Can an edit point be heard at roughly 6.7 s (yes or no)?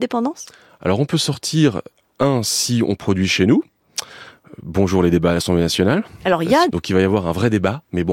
yes